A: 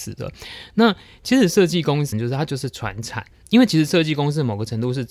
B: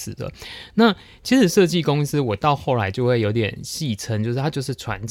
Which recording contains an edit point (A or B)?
A